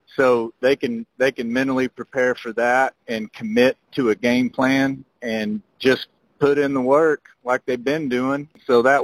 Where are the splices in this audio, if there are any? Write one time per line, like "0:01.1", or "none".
none